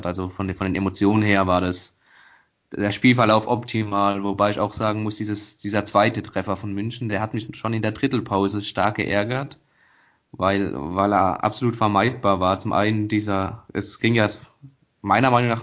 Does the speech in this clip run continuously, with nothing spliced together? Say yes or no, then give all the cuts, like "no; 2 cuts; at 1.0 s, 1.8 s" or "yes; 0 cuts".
yes; 0 cuts